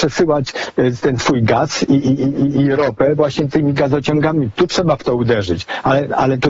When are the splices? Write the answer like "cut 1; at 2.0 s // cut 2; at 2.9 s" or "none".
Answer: cut 1; at 4.6 s